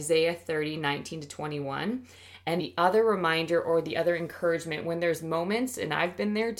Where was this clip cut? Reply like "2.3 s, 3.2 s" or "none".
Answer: 2.6 s